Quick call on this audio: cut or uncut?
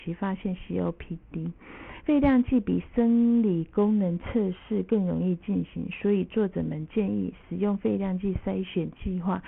uncut